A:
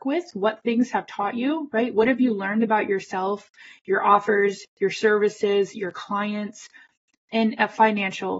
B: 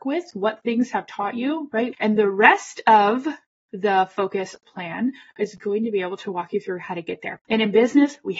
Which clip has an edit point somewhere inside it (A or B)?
B